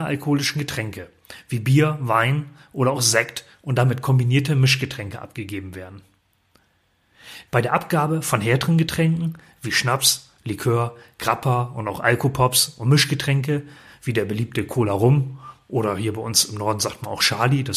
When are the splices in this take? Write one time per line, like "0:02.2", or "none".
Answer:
0:07.5

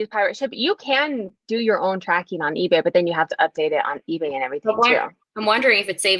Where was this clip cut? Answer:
none

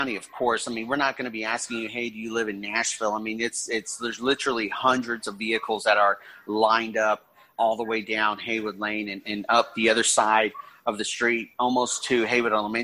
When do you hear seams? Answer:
0:07.5

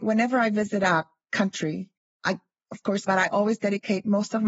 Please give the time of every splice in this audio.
0:03.1

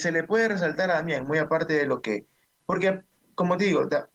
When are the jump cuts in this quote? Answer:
none

